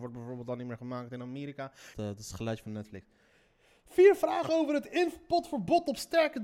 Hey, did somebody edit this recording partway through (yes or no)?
yes